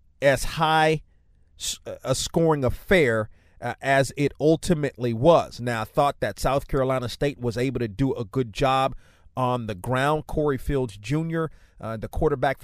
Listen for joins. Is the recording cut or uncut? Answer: uncut